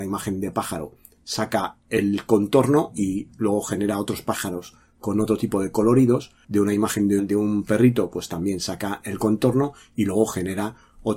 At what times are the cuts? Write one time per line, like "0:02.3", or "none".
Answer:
0:07.2